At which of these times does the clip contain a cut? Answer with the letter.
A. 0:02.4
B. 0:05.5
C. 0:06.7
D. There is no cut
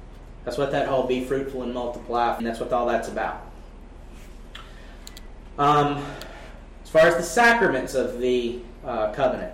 A